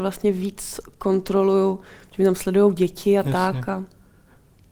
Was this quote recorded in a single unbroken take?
yes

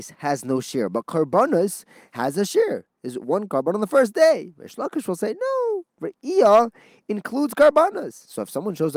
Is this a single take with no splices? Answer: yes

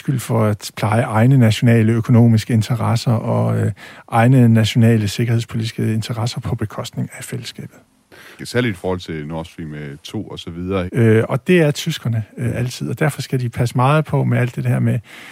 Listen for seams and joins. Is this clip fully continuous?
no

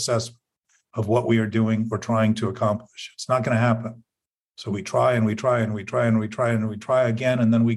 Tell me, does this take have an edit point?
no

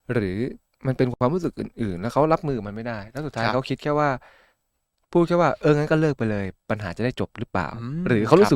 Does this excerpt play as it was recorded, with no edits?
yes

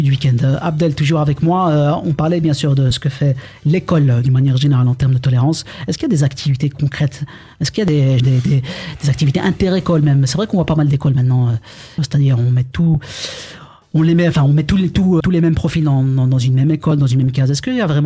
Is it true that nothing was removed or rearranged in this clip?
no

